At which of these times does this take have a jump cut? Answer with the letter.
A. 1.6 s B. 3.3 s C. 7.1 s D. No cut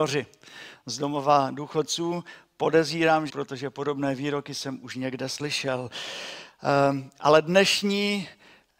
B